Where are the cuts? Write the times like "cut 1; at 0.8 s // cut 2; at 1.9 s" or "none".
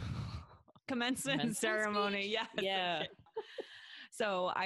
cut 1; at 3.3 s